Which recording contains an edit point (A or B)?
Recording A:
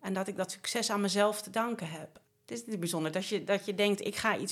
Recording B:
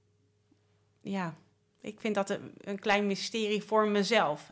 A